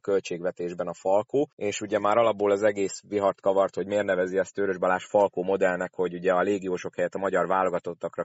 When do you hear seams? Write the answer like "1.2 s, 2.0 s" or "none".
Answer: 1.5 s